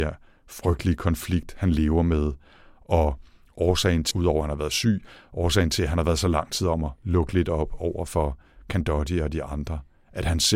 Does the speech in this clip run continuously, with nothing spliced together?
no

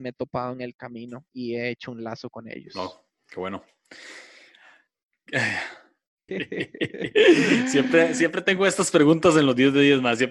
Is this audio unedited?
no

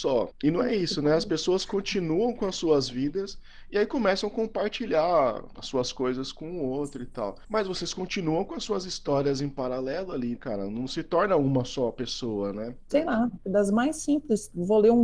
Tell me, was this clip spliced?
yes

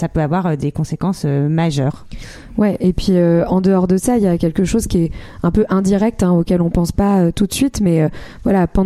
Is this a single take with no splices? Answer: yes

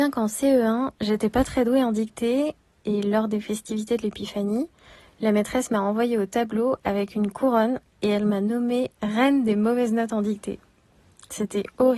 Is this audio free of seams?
yes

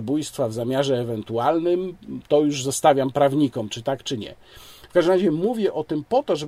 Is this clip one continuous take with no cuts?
yes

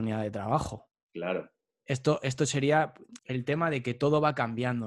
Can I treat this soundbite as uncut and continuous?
no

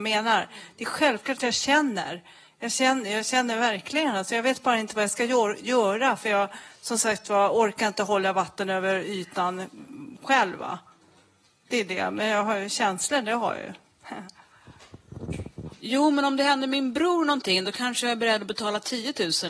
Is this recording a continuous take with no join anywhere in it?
no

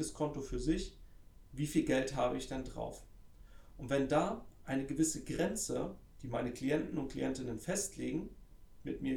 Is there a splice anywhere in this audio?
no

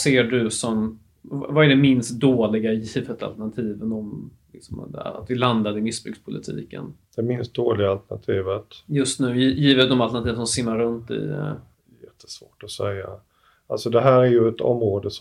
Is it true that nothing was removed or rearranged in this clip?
yes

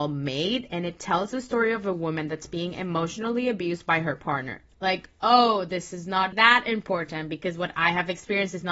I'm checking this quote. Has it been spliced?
yes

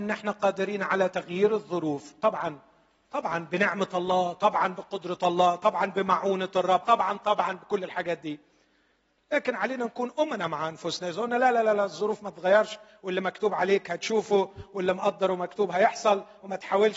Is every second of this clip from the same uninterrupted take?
no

